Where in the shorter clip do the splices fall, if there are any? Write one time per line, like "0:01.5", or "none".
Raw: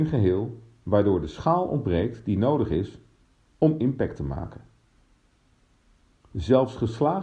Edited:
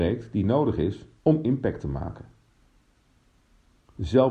0:01.2